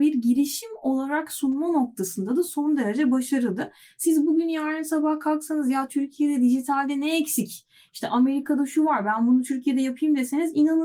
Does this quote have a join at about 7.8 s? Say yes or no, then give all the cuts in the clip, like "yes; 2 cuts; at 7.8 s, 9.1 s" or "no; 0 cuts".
no; 0 cuts